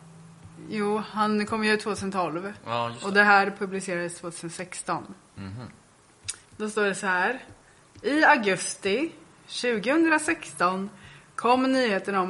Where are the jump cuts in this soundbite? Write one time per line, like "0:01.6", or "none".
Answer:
0:06.5